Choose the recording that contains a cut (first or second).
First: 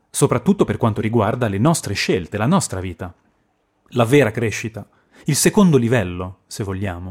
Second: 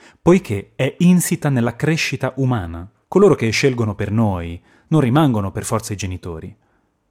second